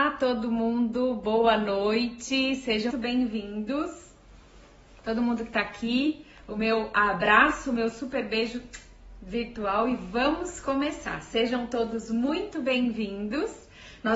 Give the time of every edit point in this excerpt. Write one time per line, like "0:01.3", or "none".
0:02.9